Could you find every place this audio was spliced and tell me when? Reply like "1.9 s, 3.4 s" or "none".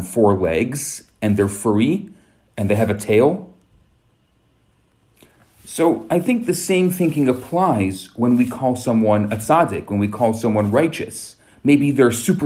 11.5 s